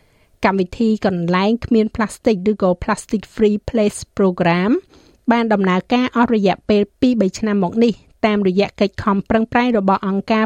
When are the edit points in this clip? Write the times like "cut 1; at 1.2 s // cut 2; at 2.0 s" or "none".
none